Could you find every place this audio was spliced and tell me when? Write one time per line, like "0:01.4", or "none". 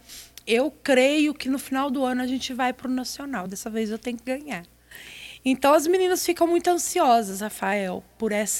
none